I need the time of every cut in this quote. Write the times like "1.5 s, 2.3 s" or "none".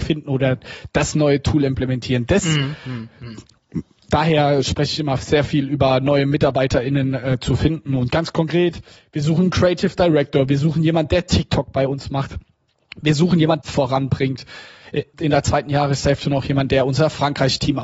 13.6 s, 15.1 s